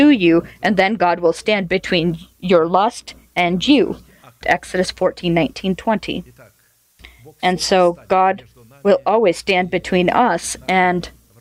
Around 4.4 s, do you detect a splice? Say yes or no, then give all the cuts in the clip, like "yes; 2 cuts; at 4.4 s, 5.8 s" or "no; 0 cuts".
yes; 1 cut; at 4.4 s